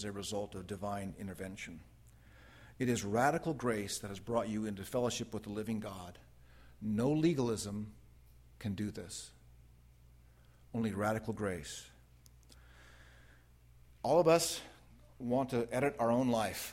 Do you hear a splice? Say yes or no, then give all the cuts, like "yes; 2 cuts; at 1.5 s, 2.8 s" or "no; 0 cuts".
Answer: no; 0 cuts